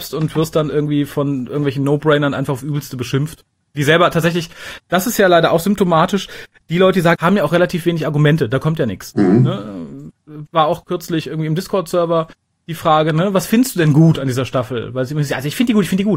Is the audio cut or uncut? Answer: cut